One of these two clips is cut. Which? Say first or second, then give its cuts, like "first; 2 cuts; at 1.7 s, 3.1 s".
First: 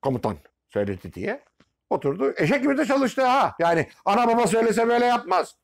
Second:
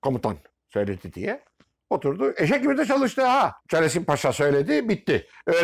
second; 1 cut; at 3.6 s